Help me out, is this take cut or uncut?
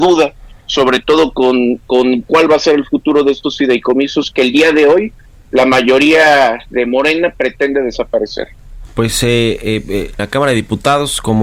cut